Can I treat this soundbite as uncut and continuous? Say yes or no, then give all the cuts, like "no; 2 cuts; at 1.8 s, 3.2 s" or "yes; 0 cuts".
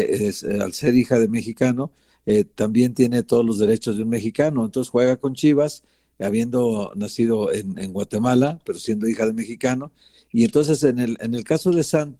yes; 0 cuts